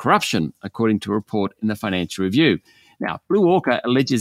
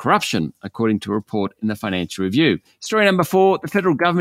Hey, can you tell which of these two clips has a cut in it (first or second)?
second